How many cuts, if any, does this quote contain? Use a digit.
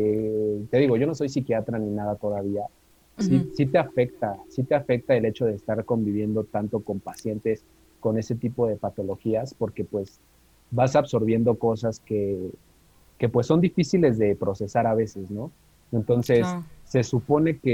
1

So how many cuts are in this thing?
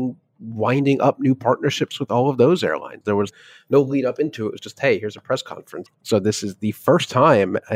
2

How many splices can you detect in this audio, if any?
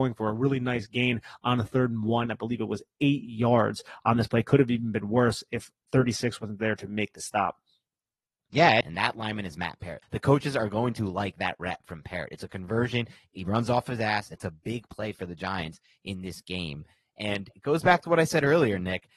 2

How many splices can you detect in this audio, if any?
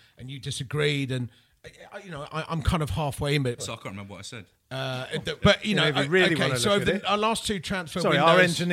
2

